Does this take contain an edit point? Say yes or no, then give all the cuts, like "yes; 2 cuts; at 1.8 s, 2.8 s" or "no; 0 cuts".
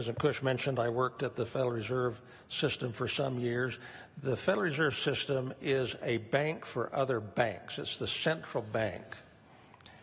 no; 0 cuts